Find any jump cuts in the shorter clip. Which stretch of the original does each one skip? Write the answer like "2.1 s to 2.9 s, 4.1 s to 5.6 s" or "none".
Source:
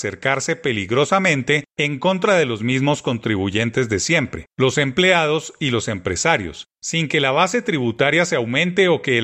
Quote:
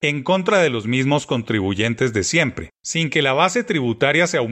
4.5 s to 6.7 s